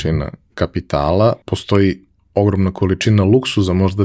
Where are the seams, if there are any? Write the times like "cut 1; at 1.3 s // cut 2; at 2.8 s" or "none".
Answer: cut 1; at 1.4 s